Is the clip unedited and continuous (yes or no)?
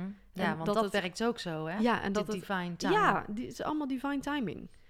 yes